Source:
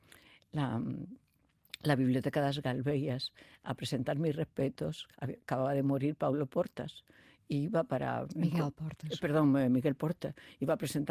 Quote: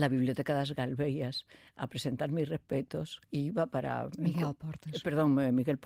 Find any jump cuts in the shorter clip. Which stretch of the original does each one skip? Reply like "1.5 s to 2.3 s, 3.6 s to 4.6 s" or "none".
5.1 s to 7.4 s